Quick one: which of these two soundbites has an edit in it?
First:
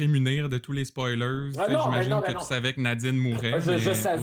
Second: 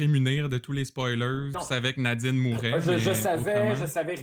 second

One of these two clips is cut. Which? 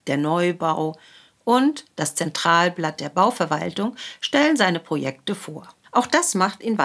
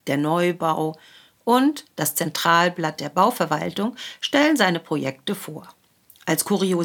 first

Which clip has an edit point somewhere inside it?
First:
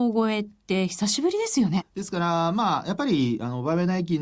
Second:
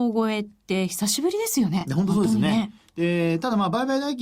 first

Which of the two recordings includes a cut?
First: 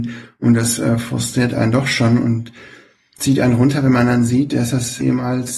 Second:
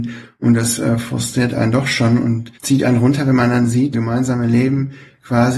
second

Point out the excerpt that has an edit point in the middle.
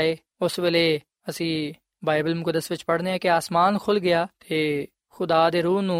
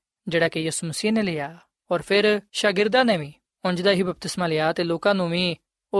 second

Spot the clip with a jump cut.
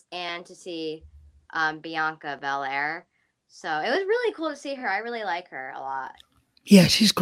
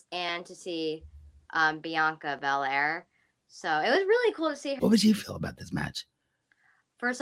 second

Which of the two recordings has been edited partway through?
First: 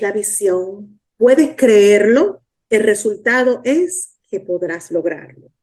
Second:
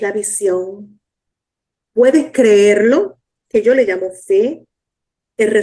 first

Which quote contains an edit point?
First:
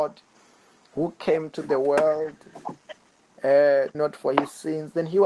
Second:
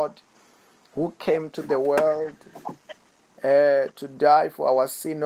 first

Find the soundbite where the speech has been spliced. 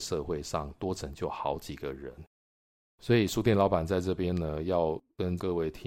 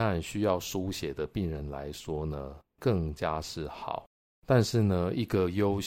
second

